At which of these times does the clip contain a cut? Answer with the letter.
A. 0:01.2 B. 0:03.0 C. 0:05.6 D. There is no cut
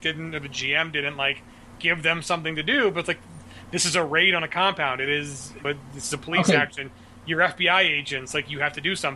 C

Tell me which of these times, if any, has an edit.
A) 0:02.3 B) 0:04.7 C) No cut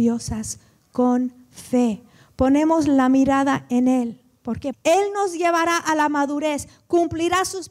B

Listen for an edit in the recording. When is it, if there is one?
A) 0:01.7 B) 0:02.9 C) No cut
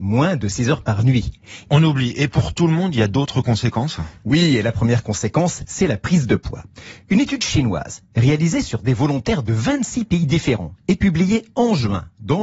A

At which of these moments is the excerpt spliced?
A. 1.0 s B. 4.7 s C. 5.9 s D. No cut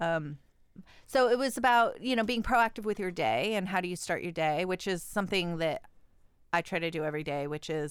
D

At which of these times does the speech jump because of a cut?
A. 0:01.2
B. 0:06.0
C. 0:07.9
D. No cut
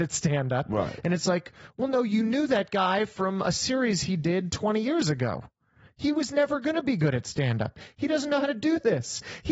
D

